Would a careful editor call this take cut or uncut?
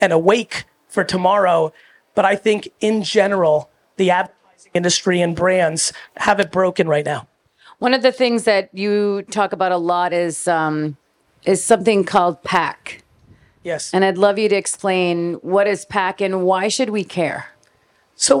uncut